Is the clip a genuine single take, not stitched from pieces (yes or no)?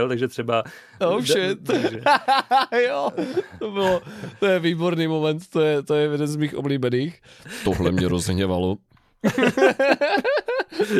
no